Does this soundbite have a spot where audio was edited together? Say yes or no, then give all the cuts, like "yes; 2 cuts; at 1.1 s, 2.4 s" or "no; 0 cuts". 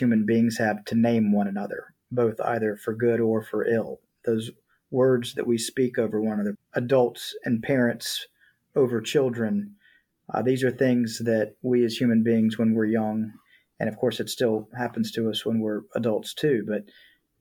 yes; 1 cut; at 6.5 s